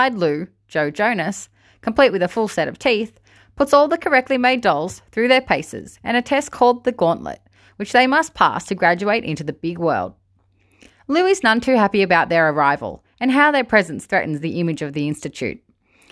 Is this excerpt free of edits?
yes; 0 cuts

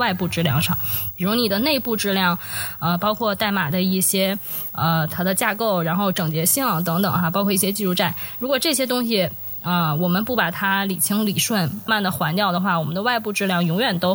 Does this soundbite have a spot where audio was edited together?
yes; 1 cut; at 11.9 s

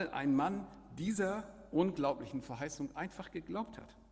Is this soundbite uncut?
yes; 0 cuts

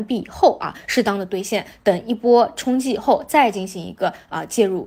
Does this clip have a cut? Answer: no; 0 cuts

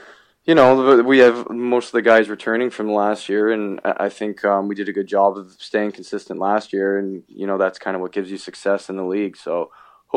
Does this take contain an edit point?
no; 0 cuts

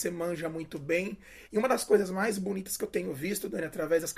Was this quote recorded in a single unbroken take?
no; 1 cut; at 1.5 s

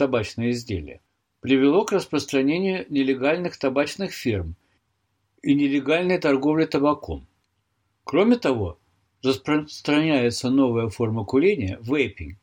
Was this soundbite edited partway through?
no; 0 cuts

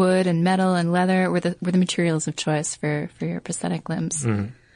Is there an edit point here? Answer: no; 0 cuts

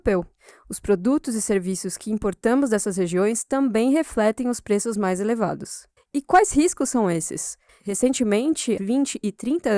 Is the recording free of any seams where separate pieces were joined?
no; 3 cuts; at 6.0 s, 7.7 s, 8.8 s

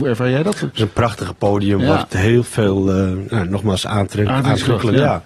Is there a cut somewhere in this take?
no; 0 cuts

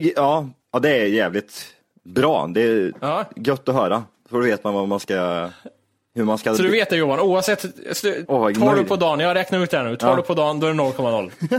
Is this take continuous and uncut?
no; 1 cut; at 8.2 s

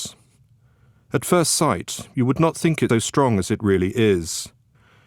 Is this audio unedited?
no; 1 cut; at 2.9 s

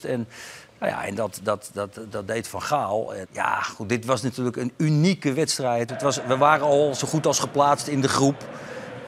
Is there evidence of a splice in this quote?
yes; 2 cuts; at 3.2 s, 5.9 s

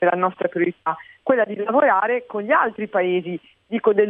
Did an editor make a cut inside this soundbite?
no; 0 cuts

